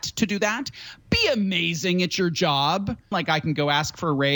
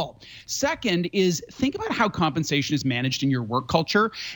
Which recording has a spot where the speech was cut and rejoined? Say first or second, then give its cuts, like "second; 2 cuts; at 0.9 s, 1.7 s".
first; 1 cut; at 3.1 s